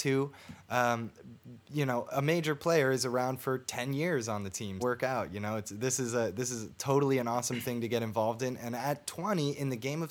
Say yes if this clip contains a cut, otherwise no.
yes